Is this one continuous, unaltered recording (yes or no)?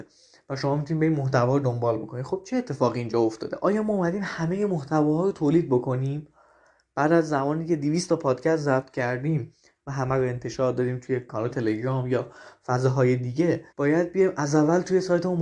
no